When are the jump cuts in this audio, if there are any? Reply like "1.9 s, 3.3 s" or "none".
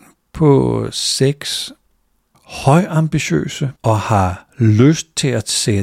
2.3 s, 3.8 s

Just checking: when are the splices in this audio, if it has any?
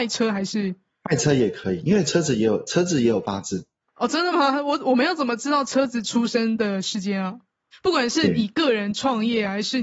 7.7 s

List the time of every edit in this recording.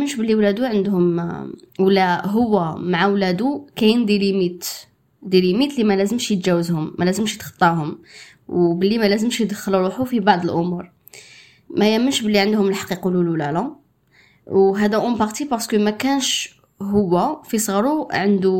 none

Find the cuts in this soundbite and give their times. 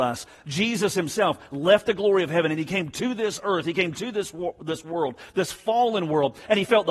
none

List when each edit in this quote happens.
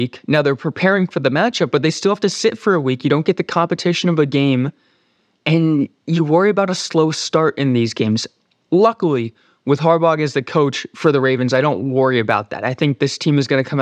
none

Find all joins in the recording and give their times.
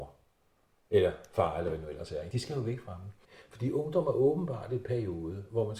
none

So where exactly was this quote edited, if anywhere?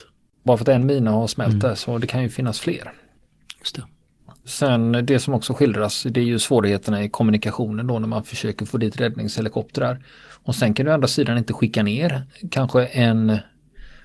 none

